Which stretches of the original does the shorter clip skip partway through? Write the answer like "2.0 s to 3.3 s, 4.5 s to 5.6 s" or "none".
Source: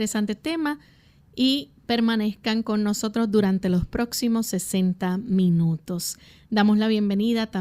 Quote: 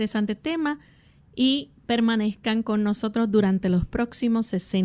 none